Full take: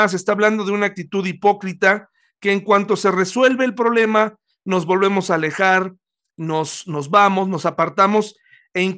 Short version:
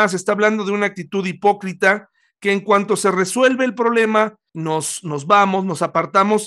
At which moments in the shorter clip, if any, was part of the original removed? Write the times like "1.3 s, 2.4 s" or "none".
4.5 s